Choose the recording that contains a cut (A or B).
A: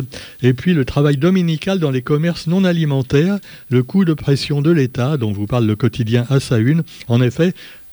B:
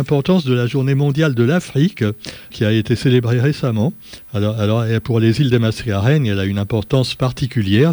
B